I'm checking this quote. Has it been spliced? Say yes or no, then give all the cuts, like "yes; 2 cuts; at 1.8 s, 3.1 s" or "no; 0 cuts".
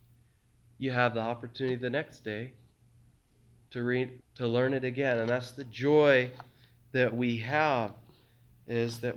yes; 1 cut; at 4.2 s